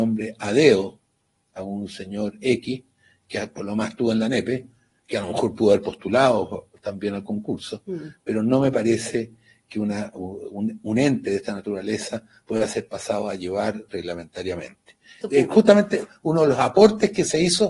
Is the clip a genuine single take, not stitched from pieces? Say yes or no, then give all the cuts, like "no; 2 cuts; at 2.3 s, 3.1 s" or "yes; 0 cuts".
no; 1 cut; at 15.2 s